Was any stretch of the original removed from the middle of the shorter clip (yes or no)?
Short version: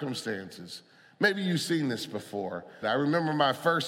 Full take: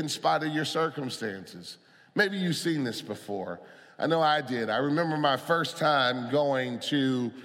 yes